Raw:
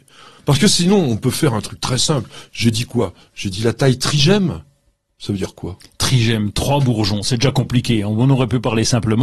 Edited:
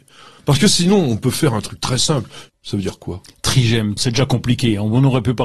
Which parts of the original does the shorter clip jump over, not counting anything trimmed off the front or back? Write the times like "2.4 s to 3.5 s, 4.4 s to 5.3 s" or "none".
2.5 s to 5.0 s, 6.5 s to 7.2 s

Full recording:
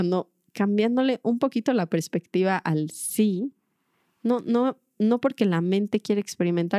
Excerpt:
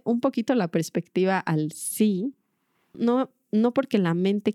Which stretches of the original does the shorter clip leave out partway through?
4.1 s to 4.4 s

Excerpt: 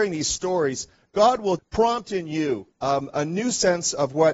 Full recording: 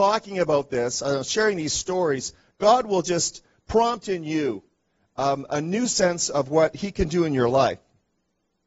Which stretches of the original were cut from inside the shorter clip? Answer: 3.0 s to 3.6 s, 4.7 s to 5.1 s

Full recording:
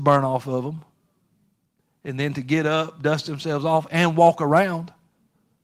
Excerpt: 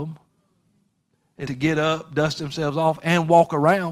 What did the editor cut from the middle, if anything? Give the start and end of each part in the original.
2.1 s to 2.3 s

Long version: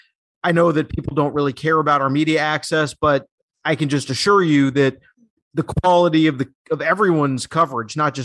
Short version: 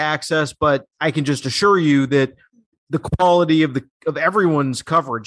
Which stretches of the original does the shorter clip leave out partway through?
3.3 s to 3.6 s

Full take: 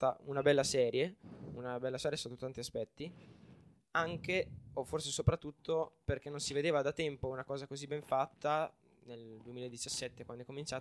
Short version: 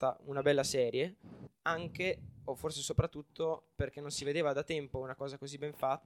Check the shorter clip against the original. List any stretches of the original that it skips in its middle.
1.5 s to 3.8 s

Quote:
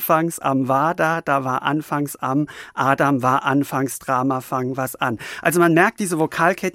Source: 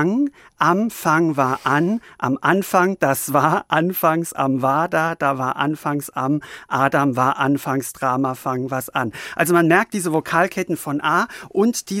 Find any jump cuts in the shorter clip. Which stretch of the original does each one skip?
none

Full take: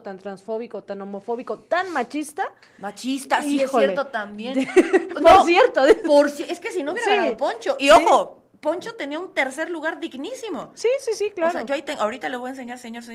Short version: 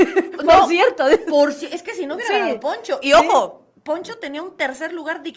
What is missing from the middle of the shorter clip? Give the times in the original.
none

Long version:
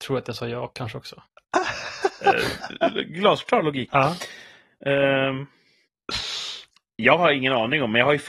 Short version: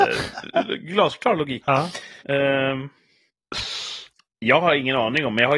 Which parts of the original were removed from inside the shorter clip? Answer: 4.5 s to 4.8 s

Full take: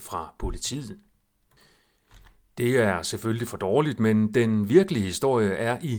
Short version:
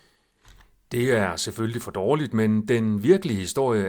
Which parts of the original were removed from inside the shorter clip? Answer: none

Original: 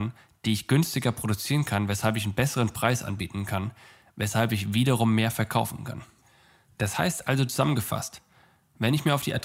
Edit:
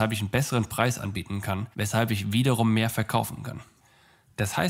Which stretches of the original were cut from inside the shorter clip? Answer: 3.8 s to 4.1 s

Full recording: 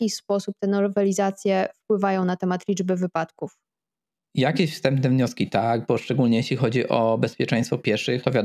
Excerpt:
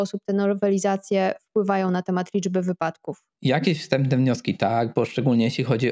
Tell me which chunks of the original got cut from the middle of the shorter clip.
3.7 s to 4.2 s

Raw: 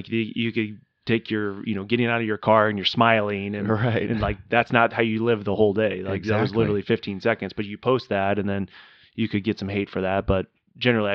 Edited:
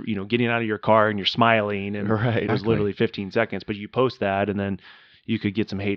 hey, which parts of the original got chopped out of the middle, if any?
4.1 s to 6.4 s

